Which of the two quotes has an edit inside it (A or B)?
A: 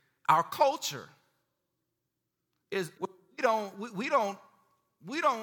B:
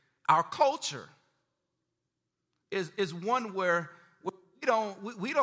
A